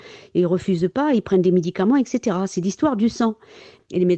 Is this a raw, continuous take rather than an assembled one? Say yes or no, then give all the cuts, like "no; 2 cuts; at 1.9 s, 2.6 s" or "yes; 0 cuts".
yes; 0 cuts